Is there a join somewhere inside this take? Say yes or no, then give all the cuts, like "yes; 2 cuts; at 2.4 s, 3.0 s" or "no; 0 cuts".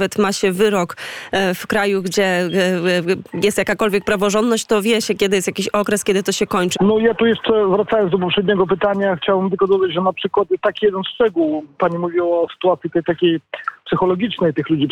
yes; 2 cuts; at 6.8 s, 13.0 s